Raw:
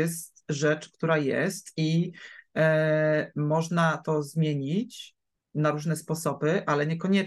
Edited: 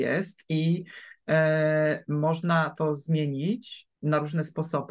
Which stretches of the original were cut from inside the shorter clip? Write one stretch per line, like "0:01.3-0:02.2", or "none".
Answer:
0:05.2-0:05.5